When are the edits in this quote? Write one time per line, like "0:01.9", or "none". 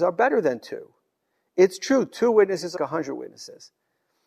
0:02.8

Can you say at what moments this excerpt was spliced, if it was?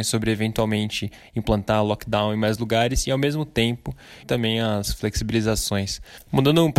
0:04.2

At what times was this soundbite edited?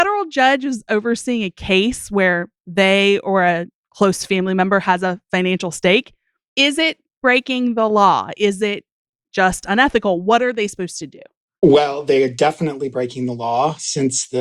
none

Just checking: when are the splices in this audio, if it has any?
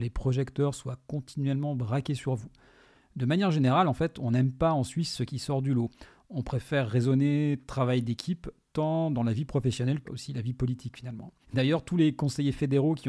0:10.1
0:11.4

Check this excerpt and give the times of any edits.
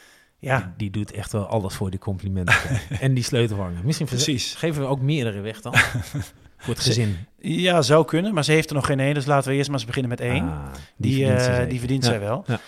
none

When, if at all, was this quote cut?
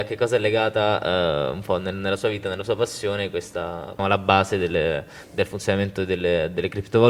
0:04.0

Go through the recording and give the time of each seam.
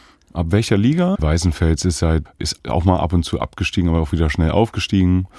0:01.1
0:02.3

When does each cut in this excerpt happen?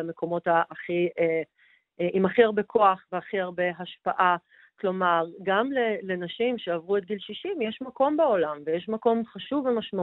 none

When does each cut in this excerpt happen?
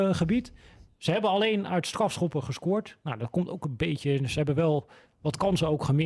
none

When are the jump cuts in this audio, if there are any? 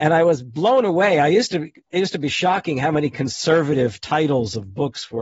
none

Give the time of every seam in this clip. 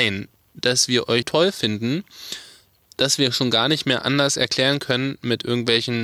0:01.2

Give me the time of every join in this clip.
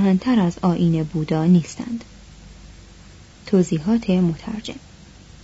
none

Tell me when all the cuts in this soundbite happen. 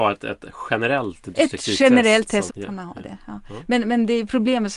0:02.5

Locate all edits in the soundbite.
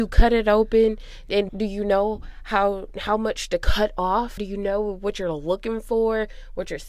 0:01.5
0:04.4

